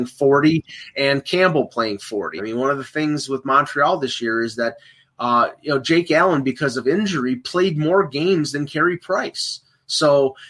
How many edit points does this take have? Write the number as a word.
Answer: one